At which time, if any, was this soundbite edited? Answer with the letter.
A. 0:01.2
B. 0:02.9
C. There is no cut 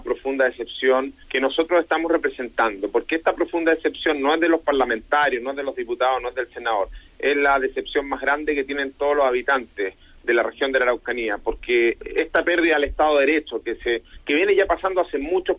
A